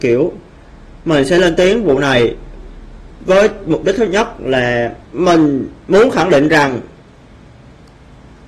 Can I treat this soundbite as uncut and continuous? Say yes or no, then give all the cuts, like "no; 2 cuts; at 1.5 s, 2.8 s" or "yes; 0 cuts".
no; 1 cut; at 5.0 s